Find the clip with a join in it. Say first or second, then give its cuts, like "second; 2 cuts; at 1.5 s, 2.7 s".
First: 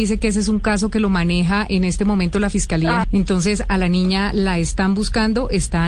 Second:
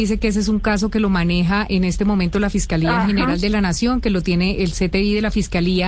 first; 1 cut; at 3.0 s